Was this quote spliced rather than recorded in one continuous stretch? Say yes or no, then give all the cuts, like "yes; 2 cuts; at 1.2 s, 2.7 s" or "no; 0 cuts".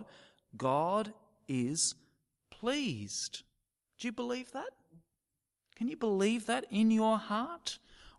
no; 0 cuts